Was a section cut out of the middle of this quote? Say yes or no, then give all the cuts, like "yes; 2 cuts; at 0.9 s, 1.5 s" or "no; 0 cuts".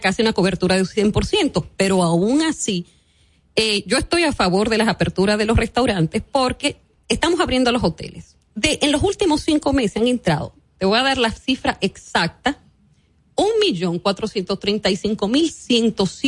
yes; 1 cut; at 8.4 s